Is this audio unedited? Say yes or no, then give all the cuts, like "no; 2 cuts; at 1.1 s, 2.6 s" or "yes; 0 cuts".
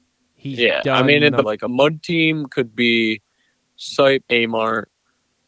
no; 2 cuts; at 1.4 s, 4.2 s